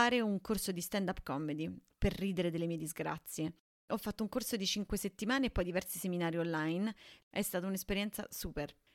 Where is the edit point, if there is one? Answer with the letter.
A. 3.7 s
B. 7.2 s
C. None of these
B